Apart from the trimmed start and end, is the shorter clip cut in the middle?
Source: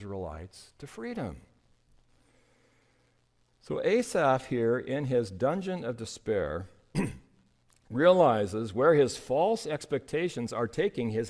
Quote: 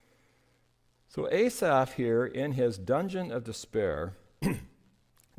no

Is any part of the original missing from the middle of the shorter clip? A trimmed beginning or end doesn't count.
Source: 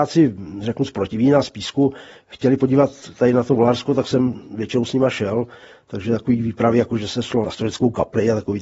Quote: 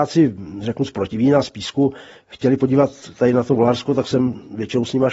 no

